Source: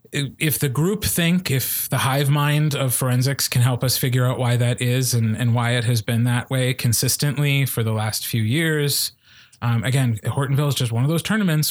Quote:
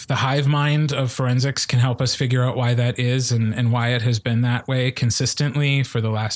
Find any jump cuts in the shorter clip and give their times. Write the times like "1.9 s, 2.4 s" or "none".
none